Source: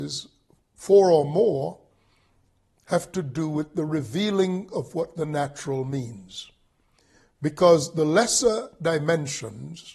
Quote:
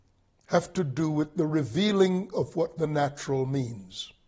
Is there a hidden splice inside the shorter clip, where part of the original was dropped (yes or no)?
no